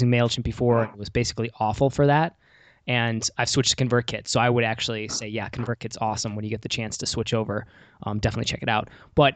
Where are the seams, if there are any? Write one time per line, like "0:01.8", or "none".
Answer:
none